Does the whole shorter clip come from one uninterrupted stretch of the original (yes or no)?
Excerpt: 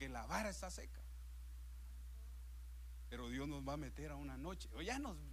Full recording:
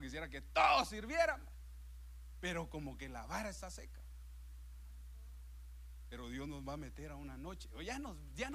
yes